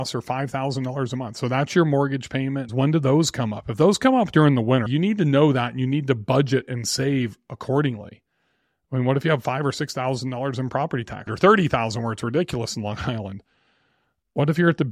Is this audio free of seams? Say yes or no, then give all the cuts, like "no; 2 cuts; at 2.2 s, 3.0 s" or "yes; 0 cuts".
no; 3 cuts; at 2.7 s, 4.9 s, 11.3 s